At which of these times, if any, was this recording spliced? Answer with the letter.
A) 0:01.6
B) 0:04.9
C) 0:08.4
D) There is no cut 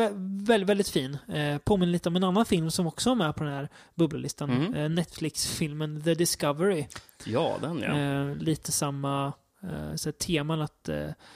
D